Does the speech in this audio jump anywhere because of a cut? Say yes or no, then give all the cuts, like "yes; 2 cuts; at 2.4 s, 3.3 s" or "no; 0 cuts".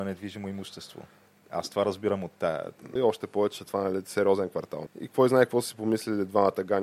yes; 2 cuts; at 3.0 s, 4.9 s